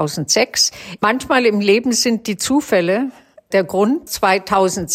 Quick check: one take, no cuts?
no; 1 cut; at 1.0 s

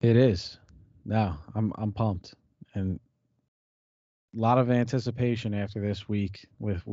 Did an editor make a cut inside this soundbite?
no; 0 cuts

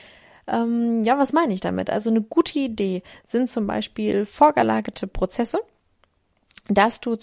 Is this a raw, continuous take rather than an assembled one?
yes; 0 cuts

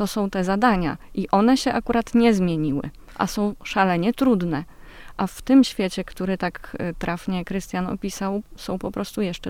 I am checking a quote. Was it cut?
no; 0 cuts

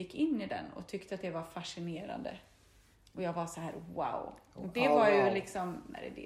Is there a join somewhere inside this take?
no; 0 cuts

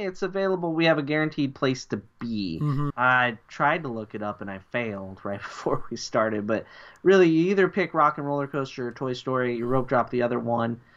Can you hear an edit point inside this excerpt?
yes; 1 cut; at 2.9 s

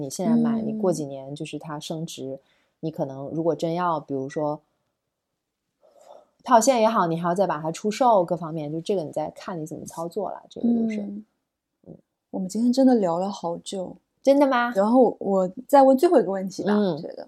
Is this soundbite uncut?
no; 1 cut; at 14.7 s

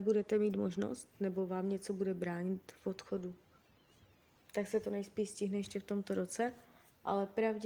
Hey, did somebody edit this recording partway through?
yes; 1 cut; at 4.4 s

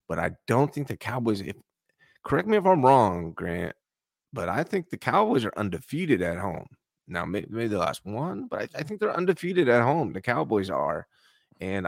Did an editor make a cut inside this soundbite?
no; 0 cuts

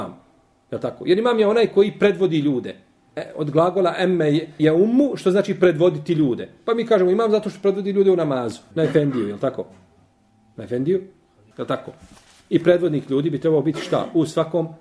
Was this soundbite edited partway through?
yes; 3 cuts; at 4.6 s, 8.7 s, 11.5 s

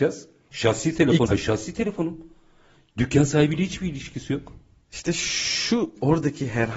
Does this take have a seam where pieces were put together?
yes; 2 cuts; at 1.3 s, 4.9 s

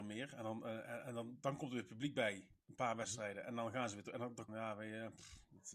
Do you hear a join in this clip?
yes; 1 cut; at 4.5 s

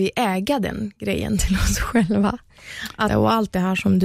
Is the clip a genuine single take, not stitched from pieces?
no; 1 cut; at 3.1 s

